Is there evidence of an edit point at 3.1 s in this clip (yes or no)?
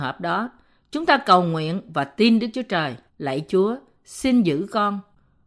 yes